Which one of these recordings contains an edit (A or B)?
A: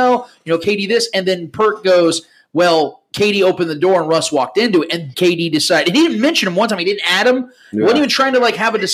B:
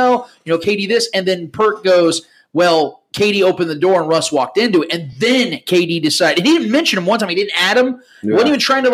A